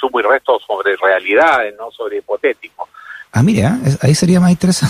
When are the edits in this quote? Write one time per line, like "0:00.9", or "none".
0:03.3